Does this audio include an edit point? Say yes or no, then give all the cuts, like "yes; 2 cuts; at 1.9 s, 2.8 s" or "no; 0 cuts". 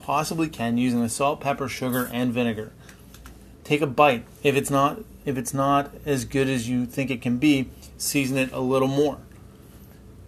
yes; 1 cut; at 5.2 s